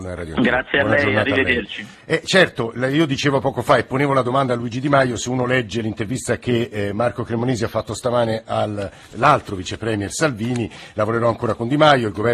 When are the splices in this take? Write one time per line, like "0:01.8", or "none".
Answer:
0:01.9

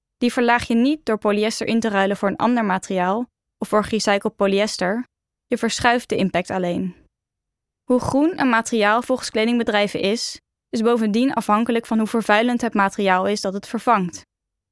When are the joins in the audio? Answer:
none

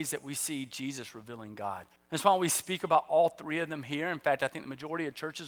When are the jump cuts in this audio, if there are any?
0:02.0

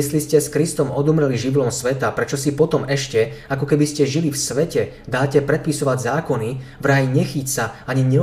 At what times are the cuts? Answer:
none

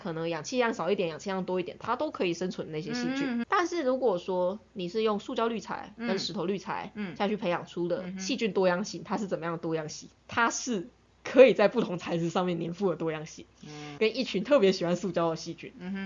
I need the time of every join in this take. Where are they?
0:10.2
0:14.0

